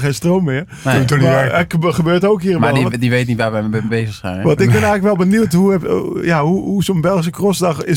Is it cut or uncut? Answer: uncut